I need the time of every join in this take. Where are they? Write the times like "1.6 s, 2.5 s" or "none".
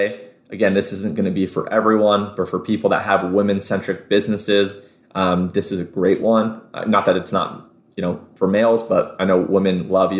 none